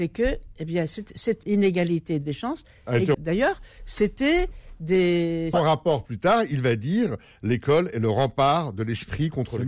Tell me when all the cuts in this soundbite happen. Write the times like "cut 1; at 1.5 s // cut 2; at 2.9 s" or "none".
cut 1; at 1.4 s // cut 2; at 3.1 s // cut 3; at 5.5 s